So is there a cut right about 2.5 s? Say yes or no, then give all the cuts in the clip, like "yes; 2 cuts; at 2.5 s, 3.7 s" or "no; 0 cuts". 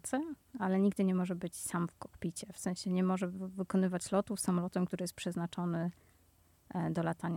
no; 0 cuts